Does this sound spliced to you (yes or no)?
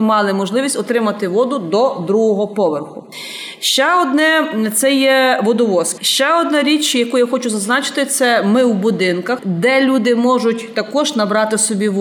yes